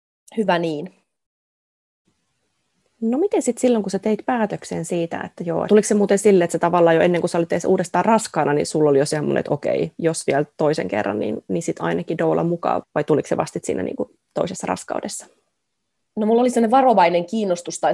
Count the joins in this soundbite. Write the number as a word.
two